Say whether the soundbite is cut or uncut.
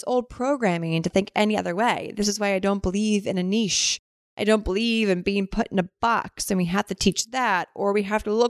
uncut